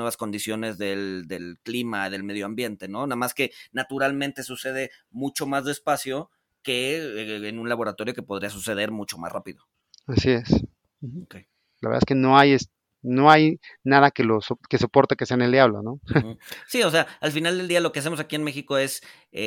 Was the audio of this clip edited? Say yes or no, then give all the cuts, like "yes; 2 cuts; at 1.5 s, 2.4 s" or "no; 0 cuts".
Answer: yes; 1 cut; at 11.8 s